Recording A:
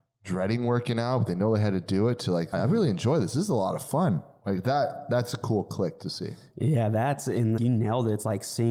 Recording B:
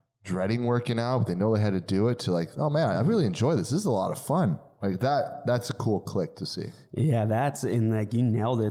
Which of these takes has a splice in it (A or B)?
A